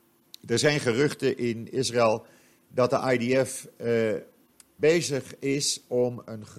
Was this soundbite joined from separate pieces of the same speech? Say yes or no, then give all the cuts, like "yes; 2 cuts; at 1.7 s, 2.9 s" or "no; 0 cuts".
yes; 1 cut; at 4.8 s